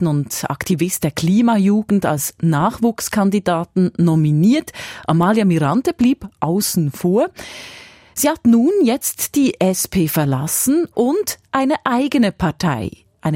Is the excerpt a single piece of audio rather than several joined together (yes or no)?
yes